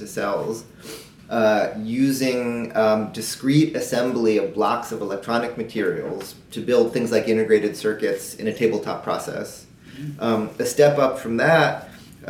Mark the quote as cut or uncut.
cut